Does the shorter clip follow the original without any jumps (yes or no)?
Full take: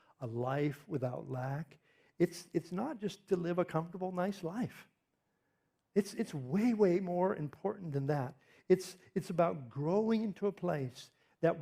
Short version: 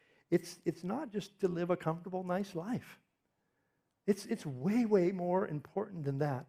yes